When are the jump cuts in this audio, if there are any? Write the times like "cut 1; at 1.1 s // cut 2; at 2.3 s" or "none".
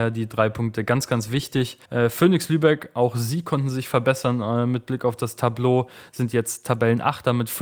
cut 1; at 1.8 s